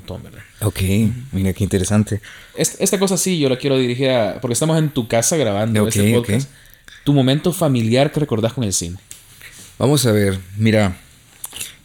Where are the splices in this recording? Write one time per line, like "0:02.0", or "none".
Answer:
0:02.5

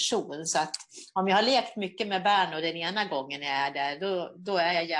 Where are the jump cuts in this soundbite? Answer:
none

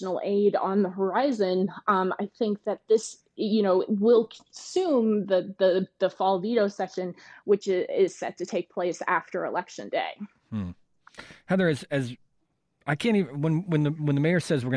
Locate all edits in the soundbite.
none

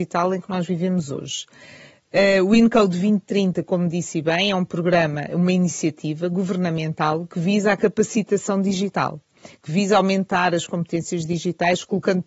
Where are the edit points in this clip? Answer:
none

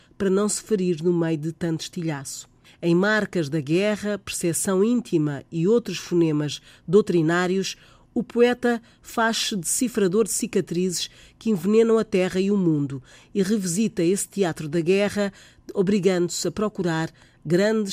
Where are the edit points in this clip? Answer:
0:02.6

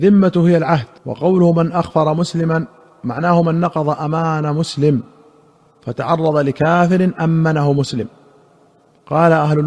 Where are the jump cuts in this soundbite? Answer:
0:01.0

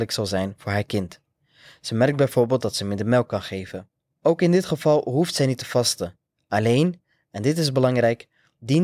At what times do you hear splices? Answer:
none

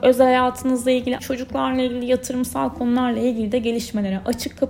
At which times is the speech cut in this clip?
0:01.2

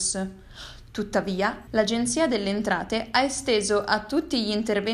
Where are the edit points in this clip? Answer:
0:01.7

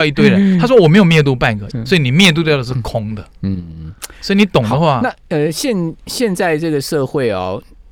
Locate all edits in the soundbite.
0:01.7

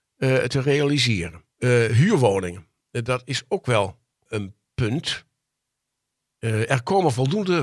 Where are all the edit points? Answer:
0:01.5

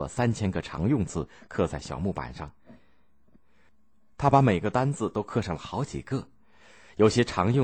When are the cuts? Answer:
none

